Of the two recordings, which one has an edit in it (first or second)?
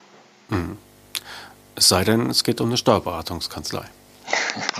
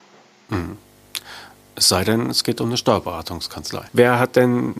second